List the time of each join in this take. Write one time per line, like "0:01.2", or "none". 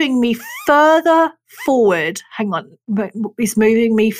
none